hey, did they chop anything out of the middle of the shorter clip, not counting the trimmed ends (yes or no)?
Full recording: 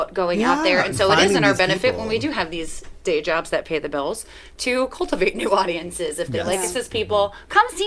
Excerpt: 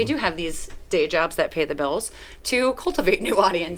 no